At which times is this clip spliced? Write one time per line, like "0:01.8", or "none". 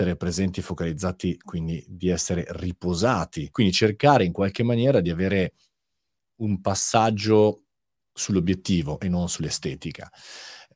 0:03.5